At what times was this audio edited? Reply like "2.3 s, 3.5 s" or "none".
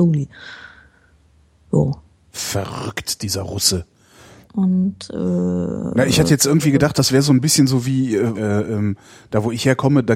4.4 s, 8.3 s